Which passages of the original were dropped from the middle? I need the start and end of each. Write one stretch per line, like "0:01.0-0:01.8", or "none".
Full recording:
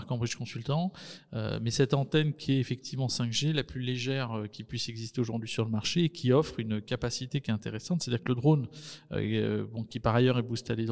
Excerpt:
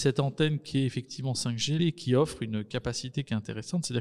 0:03.5-0:06.0

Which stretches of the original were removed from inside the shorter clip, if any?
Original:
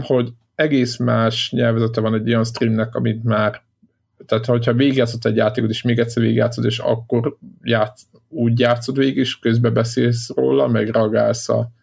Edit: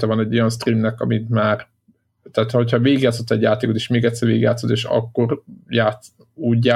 none

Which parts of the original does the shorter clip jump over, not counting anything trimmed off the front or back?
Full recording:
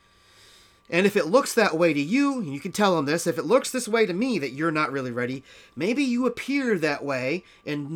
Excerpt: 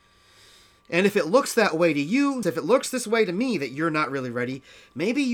0:02.4-0:03.2

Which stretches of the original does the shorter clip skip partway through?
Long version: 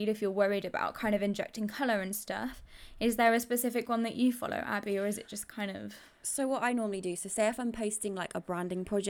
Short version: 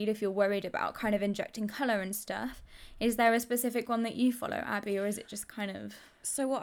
none

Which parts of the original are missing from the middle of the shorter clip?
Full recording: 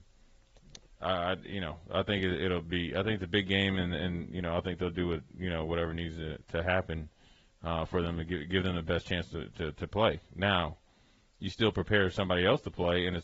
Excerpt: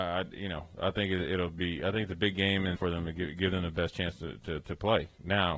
0:03.9-0:07.9

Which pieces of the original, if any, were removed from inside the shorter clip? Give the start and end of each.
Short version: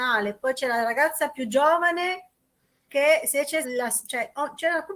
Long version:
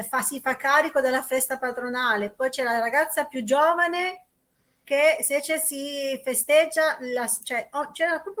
0:05.6-0:07.0

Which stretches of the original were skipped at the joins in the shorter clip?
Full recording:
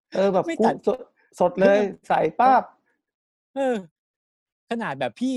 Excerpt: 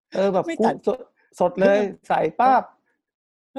none

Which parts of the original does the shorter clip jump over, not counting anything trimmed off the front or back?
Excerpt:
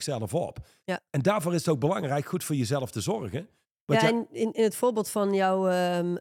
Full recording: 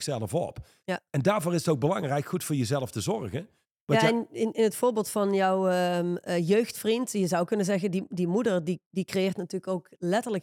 none

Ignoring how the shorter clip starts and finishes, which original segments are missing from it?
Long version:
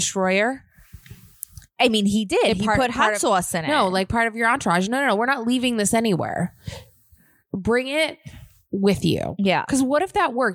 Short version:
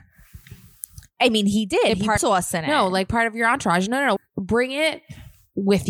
0:02.8-0:03.2
0:05.2-0:07.3

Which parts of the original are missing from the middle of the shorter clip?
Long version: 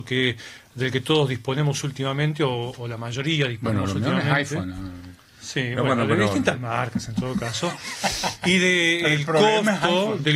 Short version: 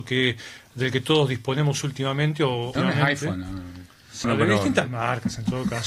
0:02.8-0:04.0
0:05.5-0:05.9

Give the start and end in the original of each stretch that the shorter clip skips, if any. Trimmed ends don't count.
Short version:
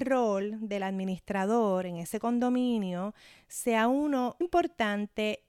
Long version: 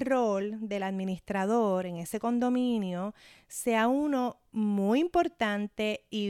0:04.4-0:05.0

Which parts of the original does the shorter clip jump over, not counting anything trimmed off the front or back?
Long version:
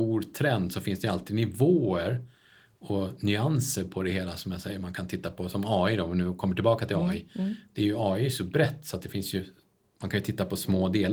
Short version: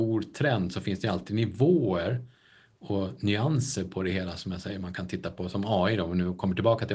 none

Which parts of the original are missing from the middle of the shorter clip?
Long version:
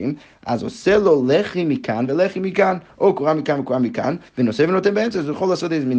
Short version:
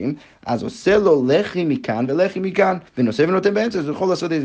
0:02.9-0:04.3

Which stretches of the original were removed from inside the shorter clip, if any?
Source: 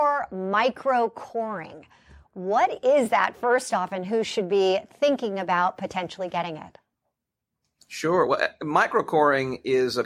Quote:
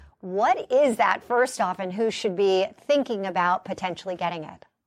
none

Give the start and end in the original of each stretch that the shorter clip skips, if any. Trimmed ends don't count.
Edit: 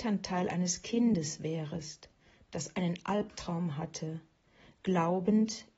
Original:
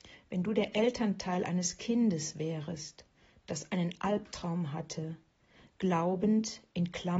none

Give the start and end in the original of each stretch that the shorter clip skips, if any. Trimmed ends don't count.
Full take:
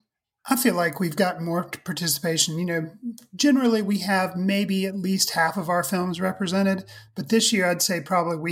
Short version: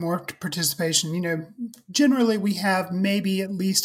none

